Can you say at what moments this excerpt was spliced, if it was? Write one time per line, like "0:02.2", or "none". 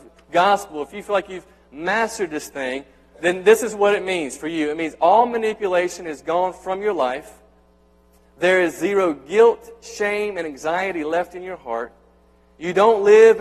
none